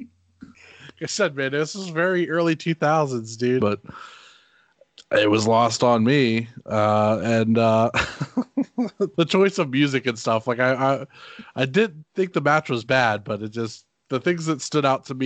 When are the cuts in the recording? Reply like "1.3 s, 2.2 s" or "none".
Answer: 3.6 s, 9.1 s